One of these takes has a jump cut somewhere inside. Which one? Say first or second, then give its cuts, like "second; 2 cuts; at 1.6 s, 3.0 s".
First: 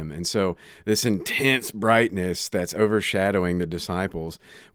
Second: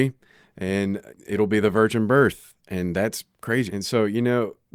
second; 2 cuts; at 1.1 s, 3.7 s